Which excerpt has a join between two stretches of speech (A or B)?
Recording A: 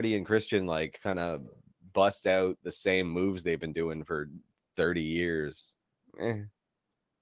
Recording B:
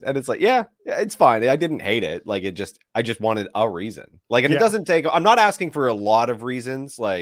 B